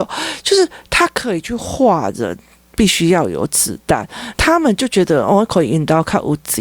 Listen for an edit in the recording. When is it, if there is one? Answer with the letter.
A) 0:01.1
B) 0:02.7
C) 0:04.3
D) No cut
C